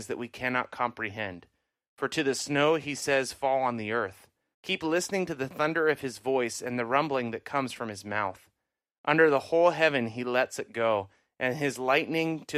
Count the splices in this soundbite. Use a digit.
1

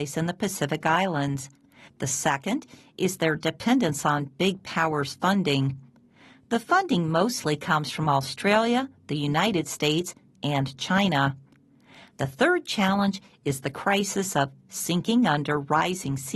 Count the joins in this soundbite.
1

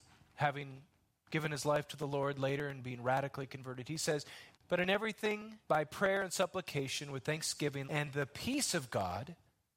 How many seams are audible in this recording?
3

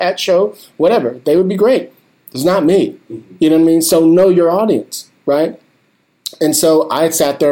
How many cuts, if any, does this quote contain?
0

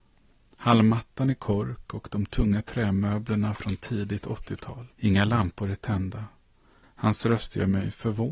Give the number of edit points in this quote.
2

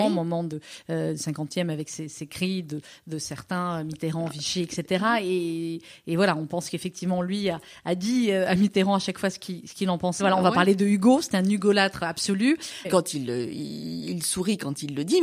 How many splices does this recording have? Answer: 2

